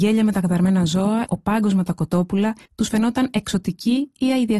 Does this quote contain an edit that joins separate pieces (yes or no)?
yes